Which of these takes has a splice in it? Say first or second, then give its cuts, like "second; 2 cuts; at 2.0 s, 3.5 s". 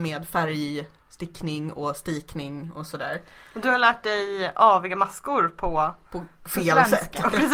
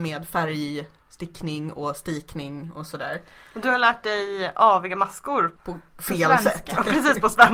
second; 1 cut; at 5.6 s